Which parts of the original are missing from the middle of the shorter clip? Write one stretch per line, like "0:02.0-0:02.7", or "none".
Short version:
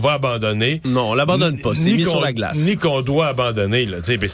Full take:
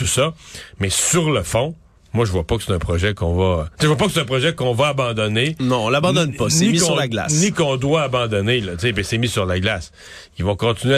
none

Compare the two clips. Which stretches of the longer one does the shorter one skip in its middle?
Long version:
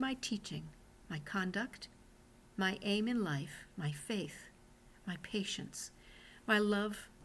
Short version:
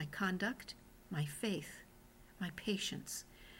0:02.2-0:03.7

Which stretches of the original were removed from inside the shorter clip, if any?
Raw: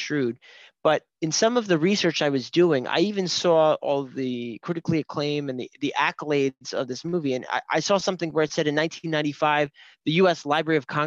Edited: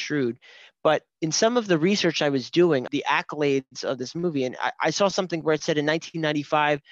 0:02.9-0:05.8

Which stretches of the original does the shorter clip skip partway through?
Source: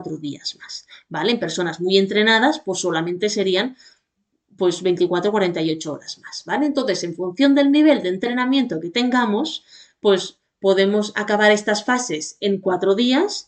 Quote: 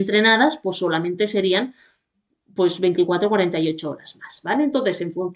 none

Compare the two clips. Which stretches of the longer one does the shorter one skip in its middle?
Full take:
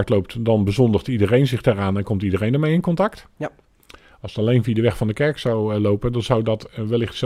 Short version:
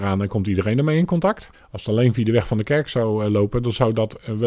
0:03.3-0:04.0

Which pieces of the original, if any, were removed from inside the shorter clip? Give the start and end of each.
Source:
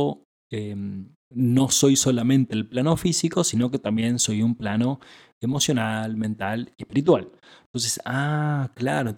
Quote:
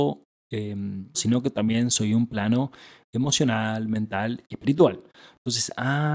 0:01.1-0:03.4

